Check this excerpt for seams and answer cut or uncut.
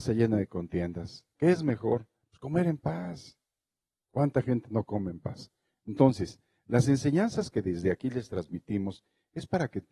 uncut